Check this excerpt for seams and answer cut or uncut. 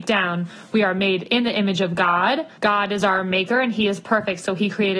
cut